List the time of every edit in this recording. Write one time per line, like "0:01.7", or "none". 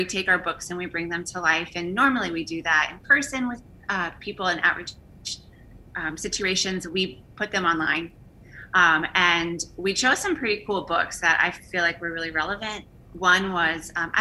none